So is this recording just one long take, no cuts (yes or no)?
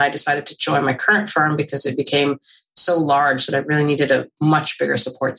yes